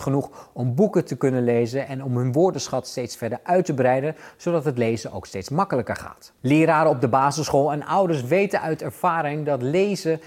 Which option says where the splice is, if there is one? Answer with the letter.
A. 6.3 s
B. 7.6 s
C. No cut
A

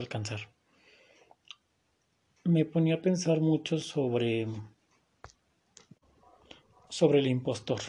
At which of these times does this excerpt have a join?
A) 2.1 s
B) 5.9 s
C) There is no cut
C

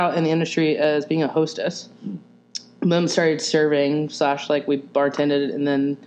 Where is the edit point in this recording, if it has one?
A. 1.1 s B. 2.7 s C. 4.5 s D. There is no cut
D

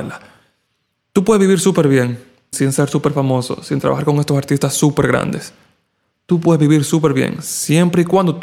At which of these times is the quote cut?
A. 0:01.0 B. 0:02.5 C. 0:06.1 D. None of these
B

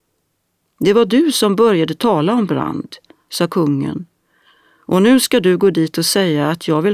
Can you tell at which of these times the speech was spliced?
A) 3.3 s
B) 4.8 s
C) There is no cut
A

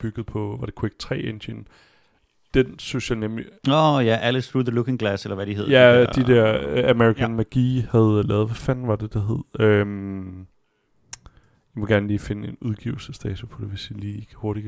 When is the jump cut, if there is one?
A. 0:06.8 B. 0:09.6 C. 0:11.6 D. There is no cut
D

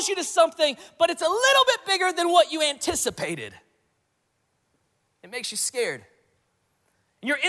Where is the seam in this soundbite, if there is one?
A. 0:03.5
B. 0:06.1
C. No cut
C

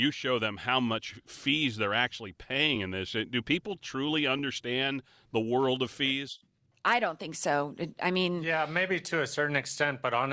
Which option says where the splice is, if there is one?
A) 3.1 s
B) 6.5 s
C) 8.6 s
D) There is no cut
D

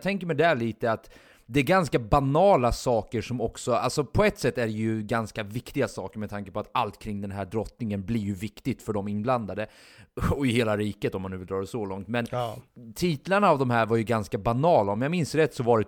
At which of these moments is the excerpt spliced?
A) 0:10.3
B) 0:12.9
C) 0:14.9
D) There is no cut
D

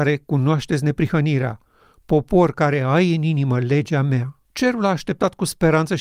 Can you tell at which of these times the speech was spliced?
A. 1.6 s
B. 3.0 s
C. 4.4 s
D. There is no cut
C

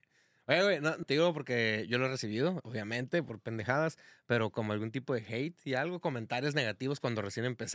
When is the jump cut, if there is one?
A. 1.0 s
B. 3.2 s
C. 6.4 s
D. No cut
A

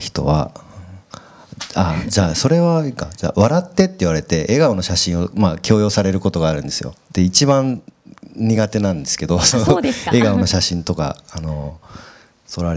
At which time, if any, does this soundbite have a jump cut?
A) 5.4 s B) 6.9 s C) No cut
B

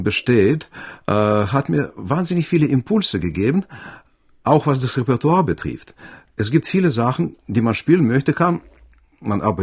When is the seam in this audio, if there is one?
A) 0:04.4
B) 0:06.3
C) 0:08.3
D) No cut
D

